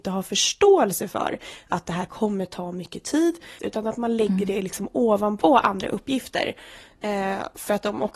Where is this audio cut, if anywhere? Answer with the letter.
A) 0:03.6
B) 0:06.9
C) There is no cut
A